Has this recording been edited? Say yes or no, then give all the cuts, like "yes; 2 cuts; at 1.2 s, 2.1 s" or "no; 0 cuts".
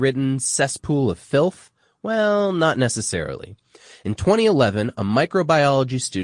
no; 0 cuts